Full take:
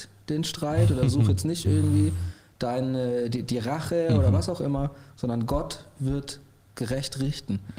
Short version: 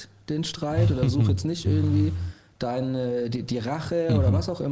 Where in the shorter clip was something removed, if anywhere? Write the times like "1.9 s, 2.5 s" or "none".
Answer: none